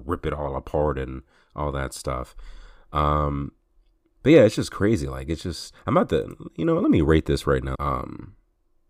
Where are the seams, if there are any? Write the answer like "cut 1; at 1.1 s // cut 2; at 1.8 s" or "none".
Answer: cut 1; at 7.8 s